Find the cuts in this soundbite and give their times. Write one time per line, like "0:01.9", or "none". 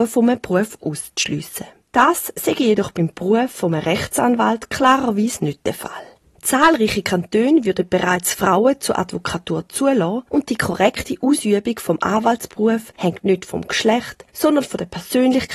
0:01.8